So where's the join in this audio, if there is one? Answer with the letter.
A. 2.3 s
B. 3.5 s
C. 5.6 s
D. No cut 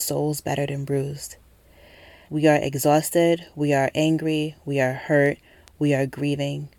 A